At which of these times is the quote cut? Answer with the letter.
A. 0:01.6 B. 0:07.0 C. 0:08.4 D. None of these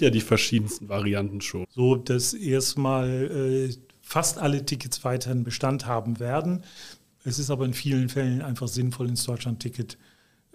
A